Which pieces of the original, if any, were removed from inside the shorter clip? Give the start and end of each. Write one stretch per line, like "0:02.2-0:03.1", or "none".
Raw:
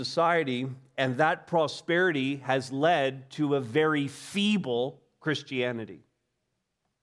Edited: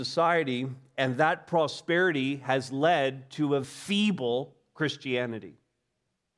0:03.6-0:04.1